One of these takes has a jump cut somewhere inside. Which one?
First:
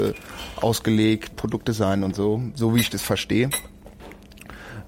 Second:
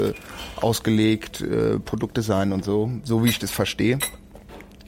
first; 1 cut; at 1.3 s

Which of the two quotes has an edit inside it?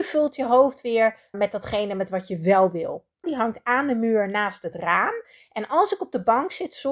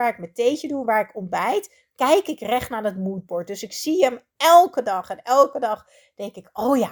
first; 2 cuts; at 1.3 s, 3.2 s

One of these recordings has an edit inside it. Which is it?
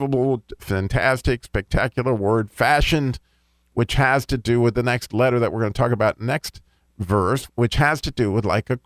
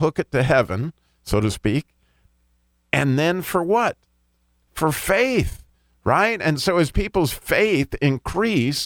first; 1 cut; at 7.5 s

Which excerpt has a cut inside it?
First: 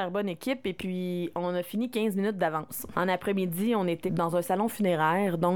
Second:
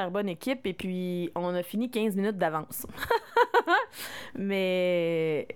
first; 2 cuts; at 2.9 s, 4.1 s

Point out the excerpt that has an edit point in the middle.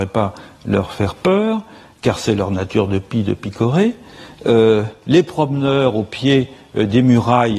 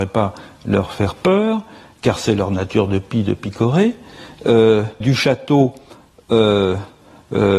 second; 1 cut; at 5.0 s

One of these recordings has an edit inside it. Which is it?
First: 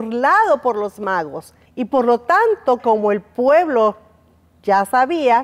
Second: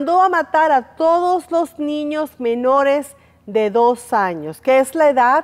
first; 2 cuts; at 1.7 s, 2.8 s

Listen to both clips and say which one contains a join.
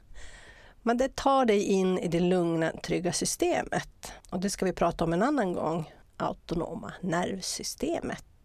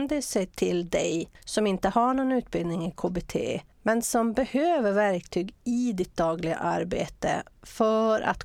first; 1 cut; at 4.2 s

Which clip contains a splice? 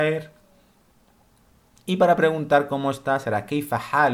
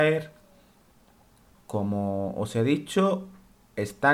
second; 1 cut; at 1.5 s

